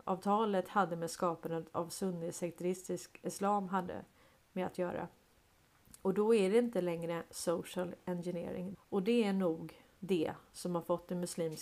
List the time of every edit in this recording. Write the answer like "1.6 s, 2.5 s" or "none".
8.7 s